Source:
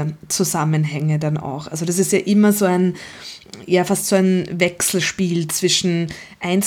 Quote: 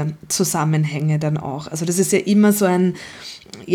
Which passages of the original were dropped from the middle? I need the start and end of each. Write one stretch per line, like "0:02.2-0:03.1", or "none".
none